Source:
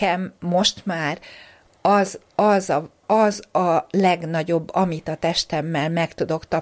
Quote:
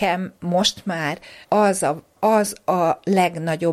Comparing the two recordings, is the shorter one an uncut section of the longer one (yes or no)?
no